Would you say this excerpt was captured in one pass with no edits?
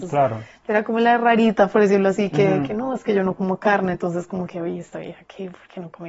yes; 0 cuts

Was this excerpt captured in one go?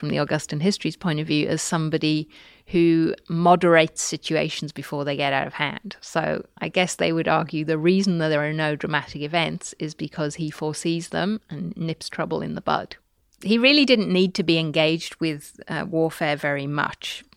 yes; 0 cuts

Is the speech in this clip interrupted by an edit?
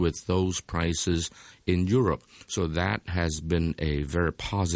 no; 0 cuts

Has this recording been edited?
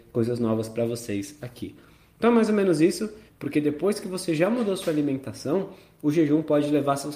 yes; 1 cut; at 3.3 s

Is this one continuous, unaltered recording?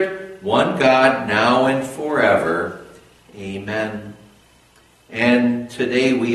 yes; 0 cuts

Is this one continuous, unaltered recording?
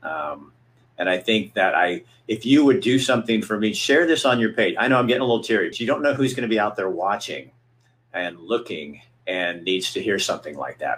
no; 1 cut; at 5.7 s

